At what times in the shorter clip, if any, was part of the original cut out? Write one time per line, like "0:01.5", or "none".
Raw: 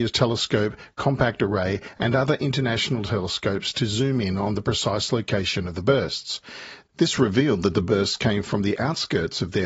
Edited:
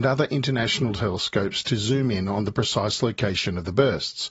none